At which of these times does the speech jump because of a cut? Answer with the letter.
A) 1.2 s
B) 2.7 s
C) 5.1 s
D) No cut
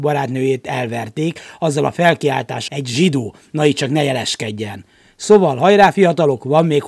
B